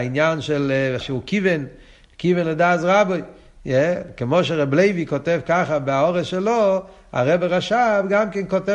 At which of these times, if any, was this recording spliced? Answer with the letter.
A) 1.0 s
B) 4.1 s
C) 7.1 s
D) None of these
A